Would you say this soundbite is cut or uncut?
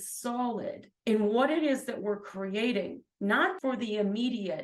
cut